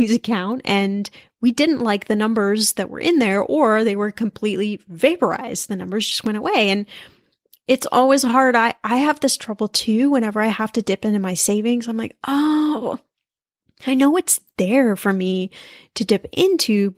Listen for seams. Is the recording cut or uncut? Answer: uncut